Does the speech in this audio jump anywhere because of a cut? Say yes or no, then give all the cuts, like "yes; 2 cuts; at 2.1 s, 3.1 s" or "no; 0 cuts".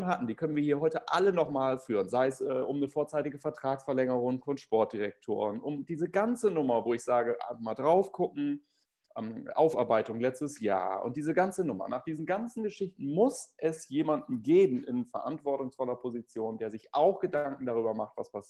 no; 0 cuts